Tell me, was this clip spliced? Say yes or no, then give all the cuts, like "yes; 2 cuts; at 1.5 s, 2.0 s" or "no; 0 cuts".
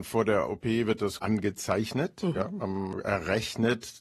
no; 0 cuts